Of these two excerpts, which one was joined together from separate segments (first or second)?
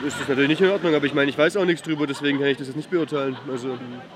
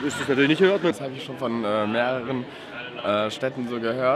second